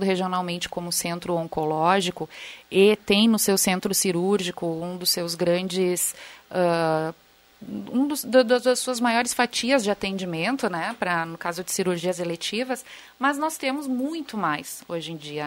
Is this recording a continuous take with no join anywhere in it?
yes; 0 cuts

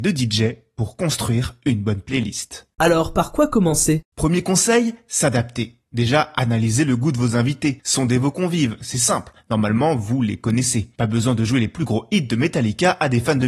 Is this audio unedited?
yes; 0 cuts

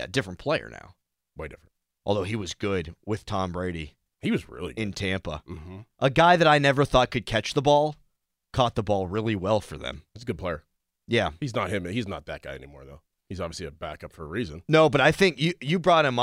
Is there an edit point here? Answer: no; 0 cuts

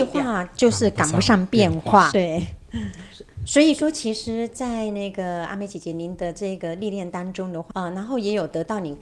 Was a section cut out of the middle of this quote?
yes; 2 cuts; at 2.1 s, 7.7 s

